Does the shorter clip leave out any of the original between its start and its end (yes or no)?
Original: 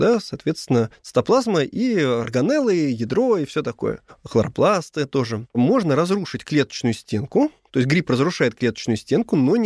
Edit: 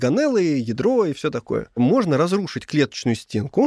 yes